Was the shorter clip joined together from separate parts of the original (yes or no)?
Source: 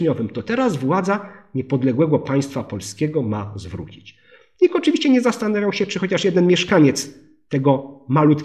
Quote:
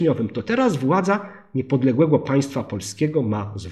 no